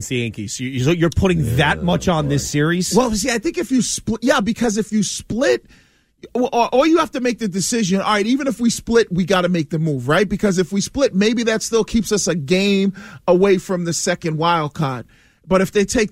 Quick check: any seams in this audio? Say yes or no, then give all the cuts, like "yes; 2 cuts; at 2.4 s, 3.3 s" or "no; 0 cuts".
no; 0 cuts